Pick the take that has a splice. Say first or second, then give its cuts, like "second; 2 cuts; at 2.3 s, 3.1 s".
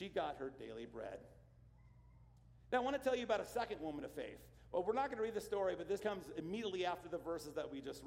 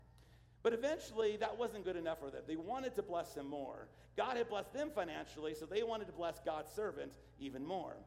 first; 1 cut; at 6.0 s